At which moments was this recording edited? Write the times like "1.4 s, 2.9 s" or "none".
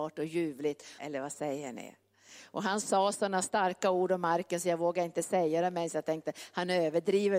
1.0 s